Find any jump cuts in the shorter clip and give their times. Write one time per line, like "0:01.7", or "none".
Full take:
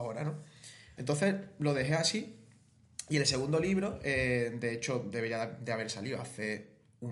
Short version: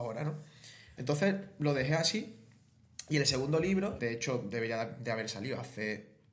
0:04.0